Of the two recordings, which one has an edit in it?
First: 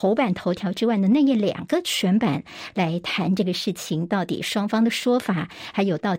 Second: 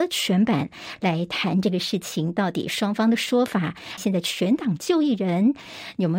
second; 1 cut; at 4.0 s

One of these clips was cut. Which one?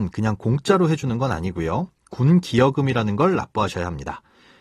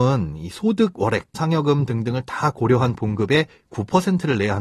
second; 1 cut; at 1.3 s

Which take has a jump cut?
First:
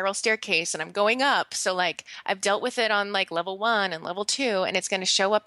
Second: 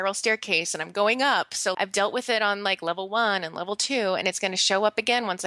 second; 1 cut; at 1.7 s

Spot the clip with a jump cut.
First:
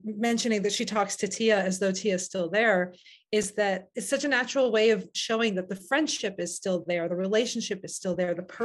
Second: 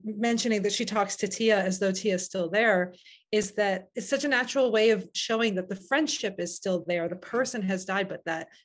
second; 1 cut; at 7.1 s

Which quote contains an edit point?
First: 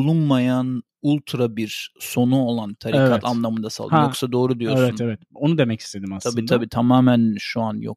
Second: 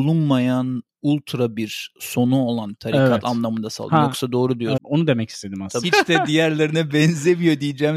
second; 2 cuts; at 4.8 s, 5.8 s

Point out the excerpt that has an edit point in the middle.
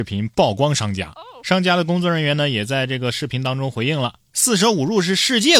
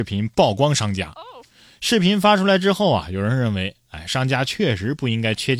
second; 1 cut; at 1.4 s

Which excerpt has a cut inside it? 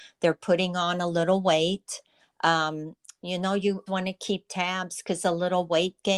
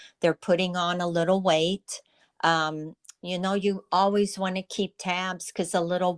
first; 1 cut; at 3.9 s

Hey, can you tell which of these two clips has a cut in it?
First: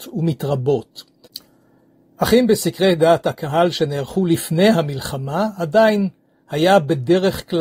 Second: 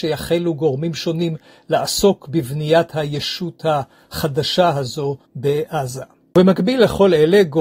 second; 1 cut; at 5.3 s

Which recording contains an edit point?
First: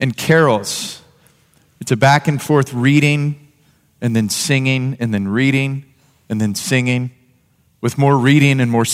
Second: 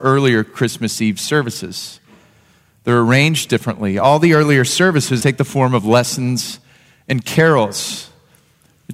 second; 1 cut; at 5.2 s

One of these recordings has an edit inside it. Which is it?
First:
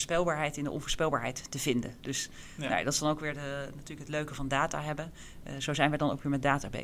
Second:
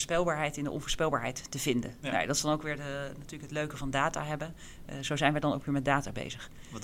second; 1 cut; at 2.0 s

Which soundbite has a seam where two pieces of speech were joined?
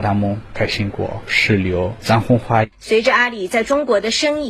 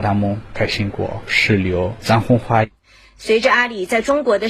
first; 1 cut; at 2.7 s

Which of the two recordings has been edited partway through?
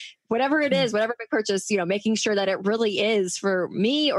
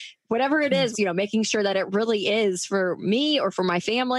second; 1 cut; at 0.9 s

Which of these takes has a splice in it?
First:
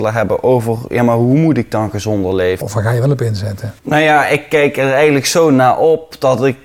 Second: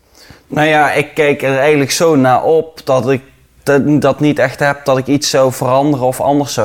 first; 2 cuts; at 2.6 s, 3.8 s

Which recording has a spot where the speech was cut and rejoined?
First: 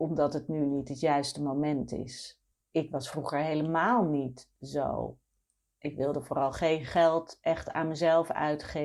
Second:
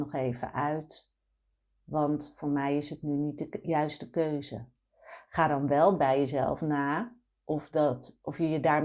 first; 1 cut; at 2.6 s

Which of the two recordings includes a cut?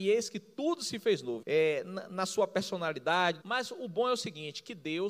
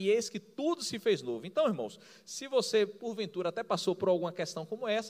first; 2 cuts; at 1.4 s, 3.4 s

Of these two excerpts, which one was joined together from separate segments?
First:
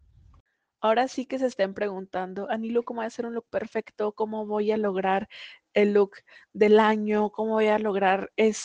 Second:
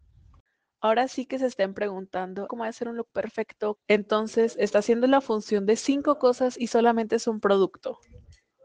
second; 2 cuts; at 2.5 s, 3.7 s

